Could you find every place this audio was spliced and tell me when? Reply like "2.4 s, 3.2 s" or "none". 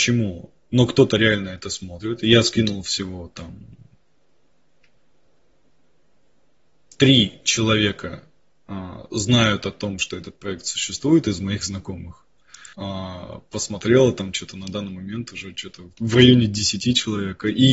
12.7 s